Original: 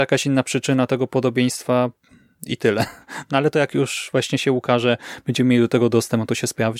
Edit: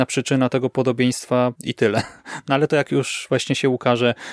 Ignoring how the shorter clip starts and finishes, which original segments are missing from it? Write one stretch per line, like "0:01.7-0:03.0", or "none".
0:01.9-0:02.4